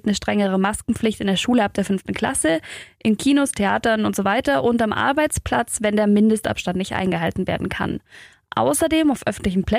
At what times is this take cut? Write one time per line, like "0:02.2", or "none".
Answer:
none